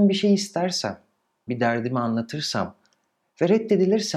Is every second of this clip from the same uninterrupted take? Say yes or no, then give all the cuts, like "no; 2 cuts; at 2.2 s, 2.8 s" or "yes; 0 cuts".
no; 1 cut; at 1.5 s